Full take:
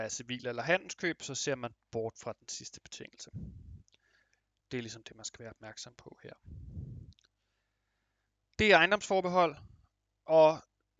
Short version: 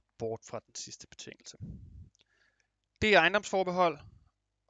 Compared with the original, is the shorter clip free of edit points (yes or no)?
no